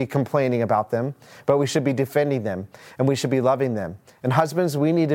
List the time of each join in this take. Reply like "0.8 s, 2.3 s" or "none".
none

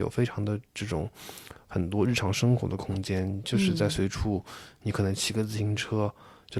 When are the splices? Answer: none

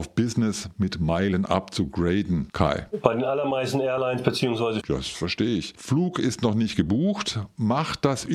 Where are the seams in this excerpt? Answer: 4.8 s

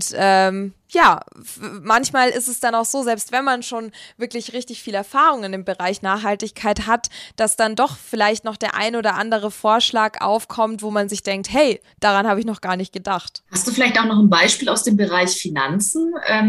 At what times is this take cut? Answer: 13.4 s

